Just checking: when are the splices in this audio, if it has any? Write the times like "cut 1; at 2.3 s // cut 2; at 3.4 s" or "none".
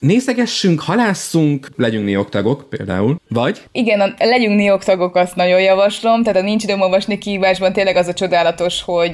none